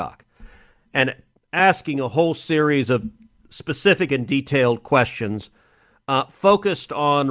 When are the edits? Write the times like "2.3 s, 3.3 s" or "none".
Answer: none

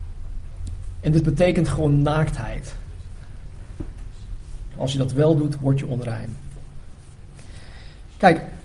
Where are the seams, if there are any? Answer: 4.7 s

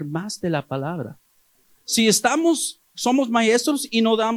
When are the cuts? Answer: none

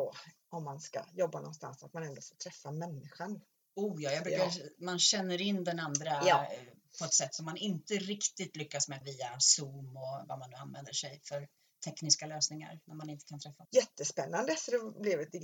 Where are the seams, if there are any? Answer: 9.0 s, 13.6 s

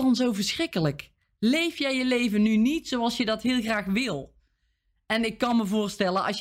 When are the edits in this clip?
none

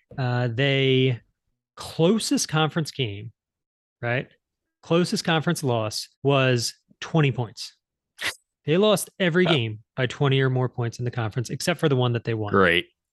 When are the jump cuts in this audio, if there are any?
6.1 s

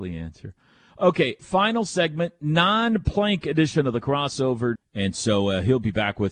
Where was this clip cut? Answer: 1.4 s, 4.8 s

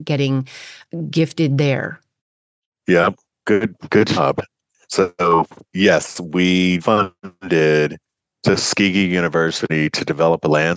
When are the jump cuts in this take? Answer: 6.8 s

